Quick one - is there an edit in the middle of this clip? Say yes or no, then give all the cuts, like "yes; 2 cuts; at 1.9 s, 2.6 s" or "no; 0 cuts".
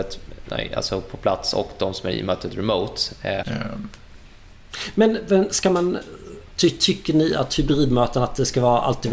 yes; 1 cut; at 3.4 s